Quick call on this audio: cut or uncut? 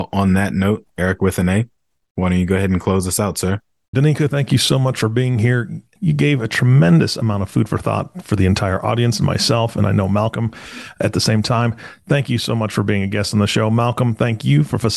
cut